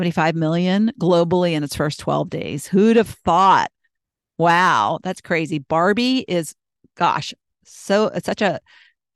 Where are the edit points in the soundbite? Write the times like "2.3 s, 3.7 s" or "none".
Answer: none